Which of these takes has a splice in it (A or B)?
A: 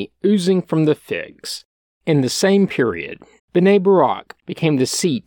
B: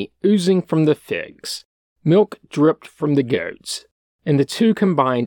A